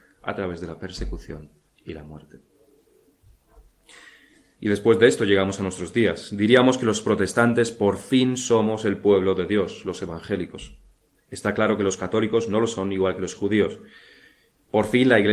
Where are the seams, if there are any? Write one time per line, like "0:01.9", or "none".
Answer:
none